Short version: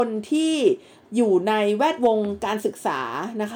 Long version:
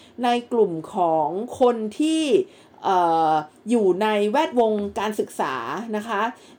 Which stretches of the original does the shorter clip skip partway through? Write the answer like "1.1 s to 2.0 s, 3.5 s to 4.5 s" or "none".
2.7 s to 3.6 s